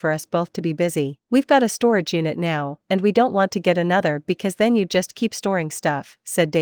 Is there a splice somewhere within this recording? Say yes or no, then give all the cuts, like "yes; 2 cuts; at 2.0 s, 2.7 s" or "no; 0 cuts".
yes; 1 cut; at 1.2 s